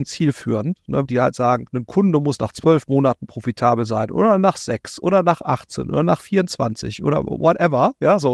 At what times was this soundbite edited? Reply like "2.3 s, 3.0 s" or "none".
1.0 s